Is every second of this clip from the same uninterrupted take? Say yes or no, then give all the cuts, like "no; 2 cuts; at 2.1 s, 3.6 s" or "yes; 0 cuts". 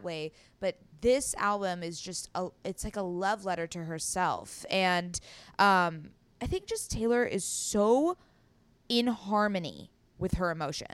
yes; 0 cuts